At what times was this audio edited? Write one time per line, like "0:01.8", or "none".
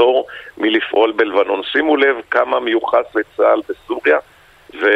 none